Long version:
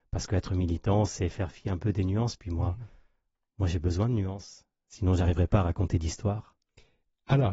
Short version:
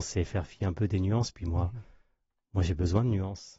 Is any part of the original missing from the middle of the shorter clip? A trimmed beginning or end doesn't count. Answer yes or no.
no